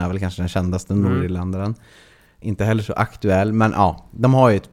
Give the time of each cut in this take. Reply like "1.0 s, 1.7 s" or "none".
none